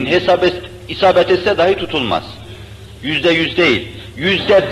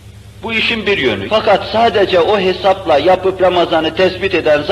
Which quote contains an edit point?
second; 1 cut; at 1.3 s

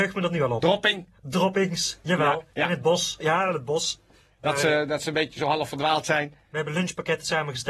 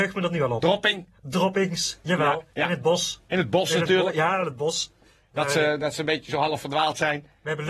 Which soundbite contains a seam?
first; 1 cut; at 3.2 s

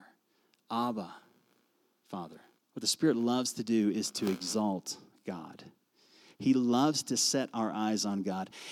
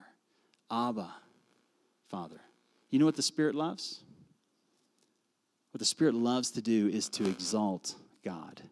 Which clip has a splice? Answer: first; 1 cut; at 2.6 s

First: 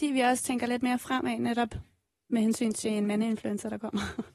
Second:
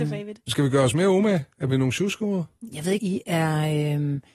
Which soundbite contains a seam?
second; 1 cut; at 3.0 s

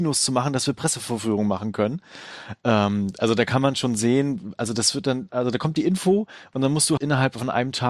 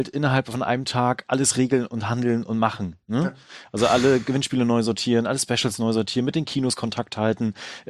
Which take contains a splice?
first; 2 cuts; at 5.3 s, 7.0 s

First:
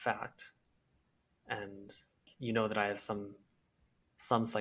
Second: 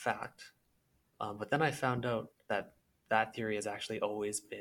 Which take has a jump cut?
second; 2 cuts; at 1.1 s, 2.5 s

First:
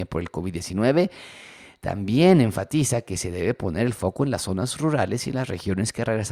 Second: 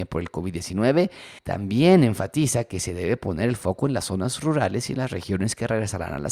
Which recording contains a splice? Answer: second; 1 cut; at 1.4 s

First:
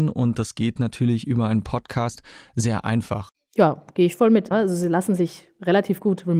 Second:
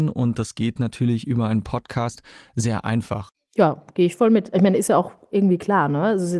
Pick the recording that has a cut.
first; 1 cut; at 4.5 s

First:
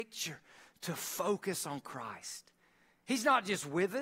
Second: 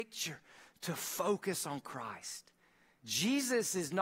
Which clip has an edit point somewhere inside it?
second; 1 cut; at 3.0 s

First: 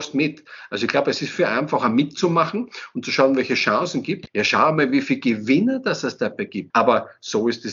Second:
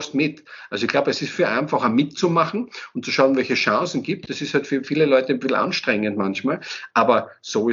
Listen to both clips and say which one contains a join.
first; 2 cuts; at 4.3 s, 6.7 s

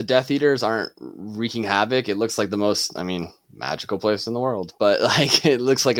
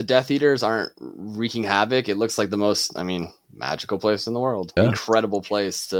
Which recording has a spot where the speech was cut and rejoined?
second; 1 cut; at 4.8 s

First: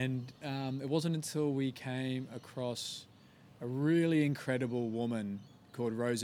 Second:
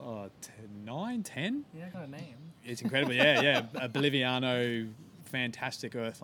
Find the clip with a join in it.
second; 1 cut; at 1.9 s

